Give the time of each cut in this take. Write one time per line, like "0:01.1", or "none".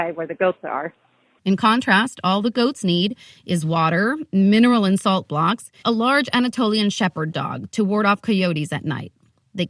0:01.4
0:05.8